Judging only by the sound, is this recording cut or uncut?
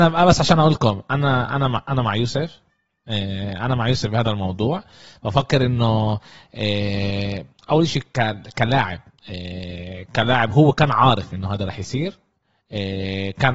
uncut